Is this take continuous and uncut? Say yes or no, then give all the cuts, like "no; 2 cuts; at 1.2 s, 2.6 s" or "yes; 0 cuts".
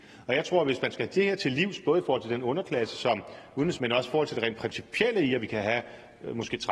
no; 1 cut; at 3.8 s